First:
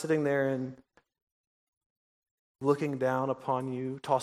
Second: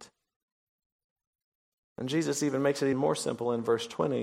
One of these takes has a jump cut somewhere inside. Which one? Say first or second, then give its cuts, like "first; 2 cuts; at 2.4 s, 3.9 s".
second; 1 cut; at 2.9 s